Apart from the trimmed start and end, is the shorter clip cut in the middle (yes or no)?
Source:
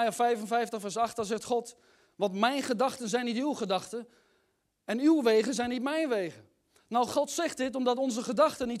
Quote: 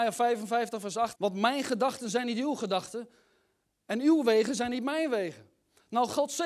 yes